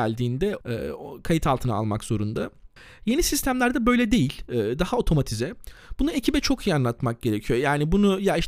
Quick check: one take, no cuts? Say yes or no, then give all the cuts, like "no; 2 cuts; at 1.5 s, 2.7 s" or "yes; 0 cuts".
yes; 0 cuts